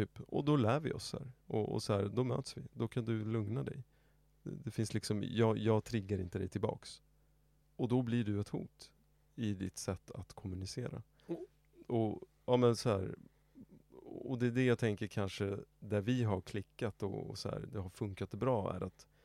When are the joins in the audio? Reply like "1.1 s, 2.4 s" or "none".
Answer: 7.6 s